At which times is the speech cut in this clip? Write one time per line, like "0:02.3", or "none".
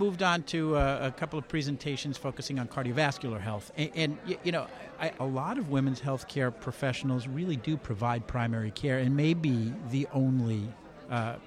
0:05.2